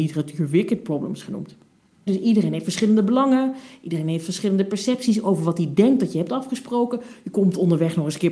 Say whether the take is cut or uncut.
cut